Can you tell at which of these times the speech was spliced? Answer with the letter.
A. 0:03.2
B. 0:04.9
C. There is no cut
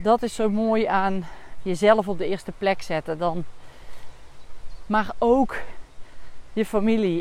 B